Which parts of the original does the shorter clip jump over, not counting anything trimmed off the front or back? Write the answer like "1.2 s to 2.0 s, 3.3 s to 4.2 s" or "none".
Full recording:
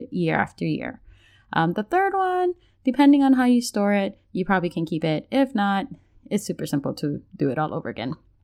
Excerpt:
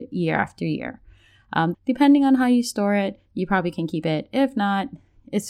1.7 s to 2.7 s